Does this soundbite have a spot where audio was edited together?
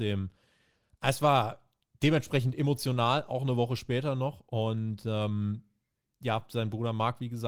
no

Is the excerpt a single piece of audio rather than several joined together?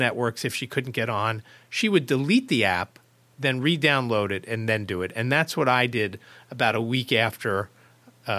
yes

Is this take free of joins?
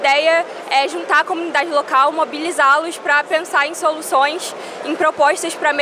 yes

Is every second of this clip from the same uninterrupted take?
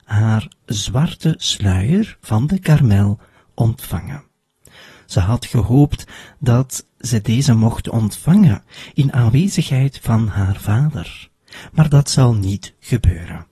yes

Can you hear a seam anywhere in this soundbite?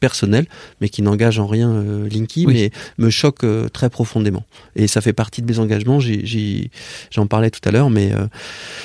no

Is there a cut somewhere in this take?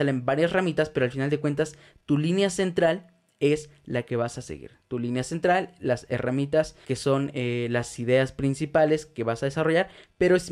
yes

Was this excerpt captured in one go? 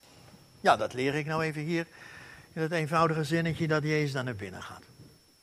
yes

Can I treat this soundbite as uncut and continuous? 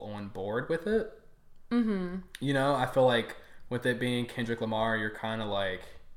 yes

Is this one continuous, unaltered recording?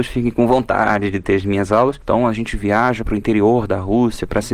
no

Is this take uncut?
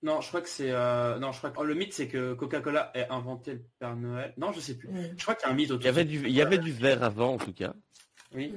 no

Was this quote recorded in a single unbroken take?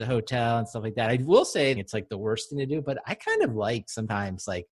no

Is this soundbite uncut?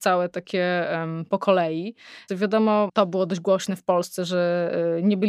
no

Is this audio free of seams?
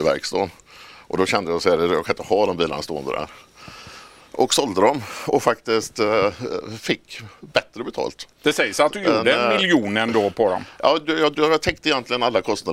yes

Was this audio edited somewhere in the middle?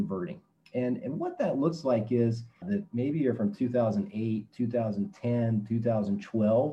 yes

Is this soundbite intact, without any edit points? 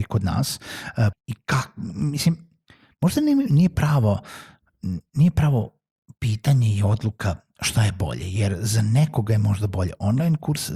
no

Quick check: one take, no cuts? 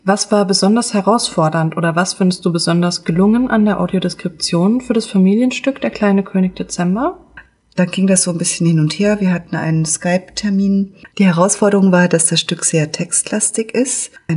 no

